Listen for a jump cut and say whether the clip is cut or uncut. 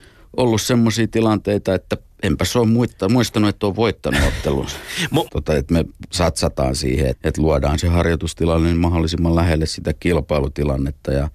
cut